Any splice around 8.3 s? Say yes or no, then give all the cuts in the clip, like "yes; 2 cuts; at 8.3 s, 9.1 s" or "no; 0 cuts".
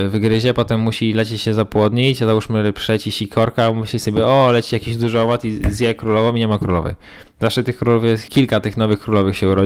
yes; 1 cut; at 8.3 s